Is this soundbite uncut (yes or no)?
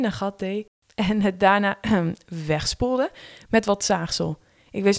yes